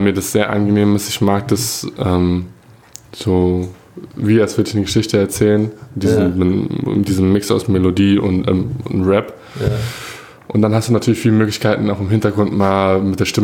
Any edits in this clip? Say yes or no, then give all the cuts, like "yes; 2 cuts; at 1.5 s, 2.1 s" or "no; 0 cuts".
no; 0 cuts